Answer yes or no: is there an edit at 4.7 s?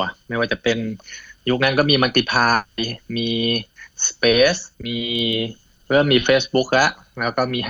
yes